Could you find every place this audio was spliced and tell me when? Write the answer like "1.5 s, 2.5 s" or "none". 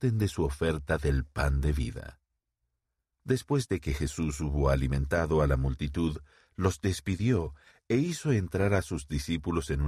none